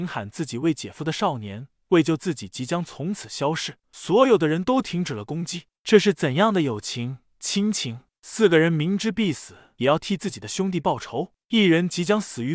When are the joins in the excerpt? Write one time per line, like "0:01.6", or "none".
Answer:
0:03.8